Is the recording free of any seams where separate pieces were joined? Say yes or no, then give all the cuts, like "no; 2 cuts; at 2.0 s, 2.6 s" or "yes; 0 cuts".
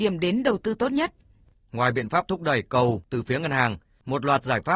no; 1 cut; at 1.5 s